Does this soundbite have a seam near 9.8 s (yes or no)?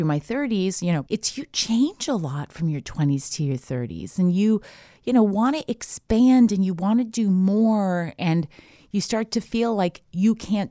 no